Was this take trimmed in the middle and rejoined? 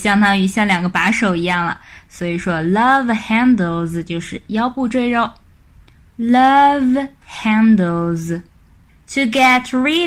yes; 1 cut; at 6.1 s

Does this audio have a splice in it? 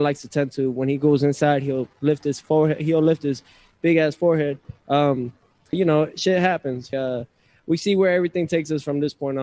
yes; 2 cuts; at 5.7 s, 6.9 s

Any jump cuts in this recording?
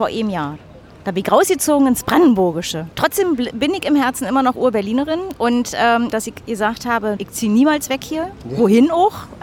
yes; 2 cuts; at 6.1 s, 7.2 s

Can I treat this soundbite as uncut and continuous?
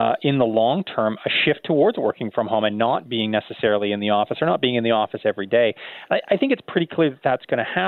yes; 0 cuts

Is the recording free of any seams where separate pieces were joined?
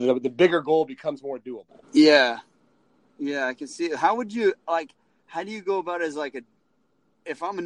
no; 1 cut; at 1.8 s

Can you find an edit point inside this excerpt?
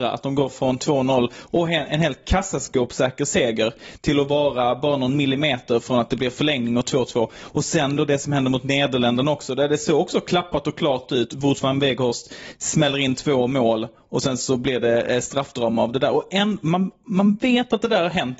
no; 0 cuts

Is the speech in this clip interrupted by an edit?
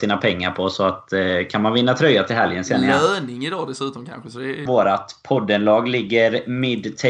yes; 1 cut; at 4.7 s

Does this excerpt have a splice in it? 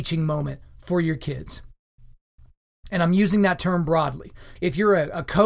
yes; 1 cut; at 4.6 s

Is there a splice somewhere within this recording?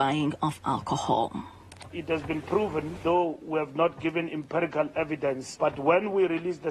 yes; 1 cut; at 3.0 s

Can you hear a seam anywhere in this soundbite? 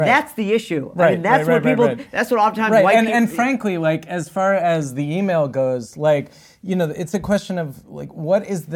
no; 0 cuts

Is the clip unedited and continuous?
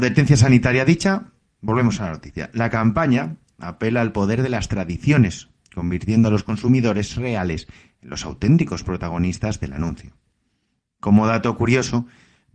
yes; 0 cuts

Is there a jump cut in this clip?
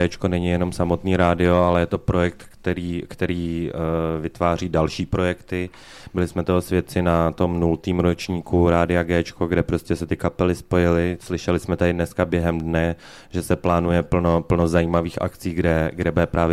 no; 0 cuts

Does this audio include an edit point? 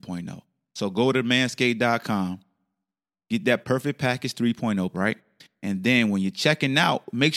yes; 1 cut; at 4.9 s

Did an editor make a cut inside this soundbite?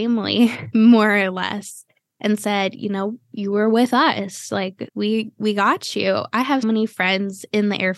yes; 2 cuts; at 4.9 s, 6.6 s

